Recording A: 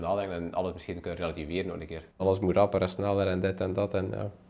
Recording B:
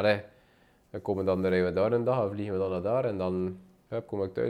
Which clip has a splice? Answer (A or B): A